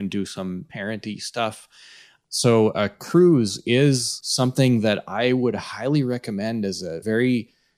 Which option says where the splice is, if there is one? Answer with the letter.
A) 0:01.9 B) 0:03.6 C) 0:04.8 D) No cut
D